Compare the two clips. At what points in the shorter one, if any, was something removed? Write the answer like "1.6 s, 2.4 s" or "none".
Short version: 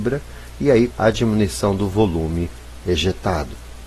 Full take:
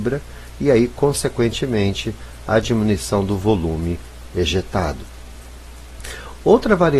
0.9 s